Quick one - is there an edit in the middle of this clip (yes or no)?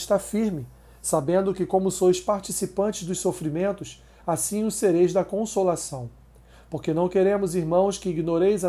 no